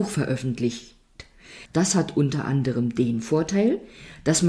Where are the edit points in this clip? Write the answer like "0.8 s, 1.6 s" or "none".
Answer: 1.7 s